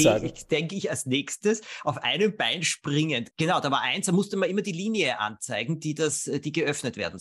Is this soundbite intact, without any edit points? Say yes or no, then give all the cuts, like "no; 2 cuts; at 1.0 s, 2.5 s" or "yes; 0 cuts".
no; 1 cut; at 3.3 s